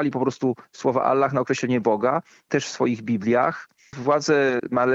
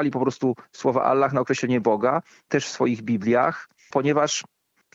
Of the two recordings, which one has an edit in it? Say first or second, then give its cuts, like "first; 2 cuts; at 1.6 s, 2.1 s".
second; 1 cut; at 3.9 s